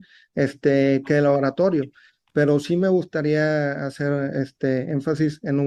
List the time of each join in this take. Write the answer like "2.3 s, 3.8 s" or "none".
none